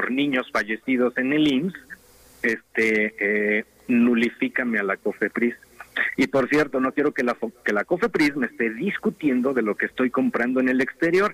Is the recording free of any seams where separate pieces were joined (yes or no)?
yes